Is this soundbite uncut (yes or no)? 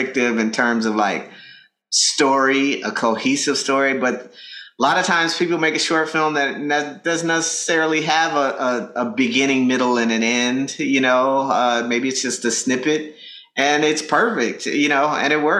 yes